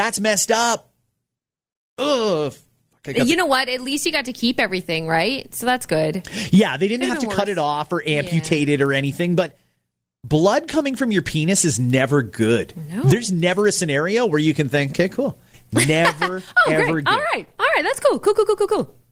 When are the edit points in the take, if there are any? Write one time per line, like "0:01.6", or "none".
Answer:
0:14.9